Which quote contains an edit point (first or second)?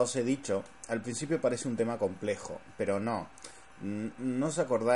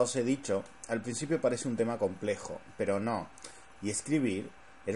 second